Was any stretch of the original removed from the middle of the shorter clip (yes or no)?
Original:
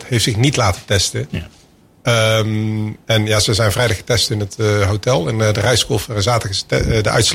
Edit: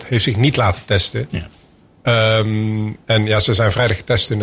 no